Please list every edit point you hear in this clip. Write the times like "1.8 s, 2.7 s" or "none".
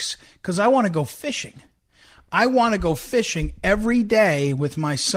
none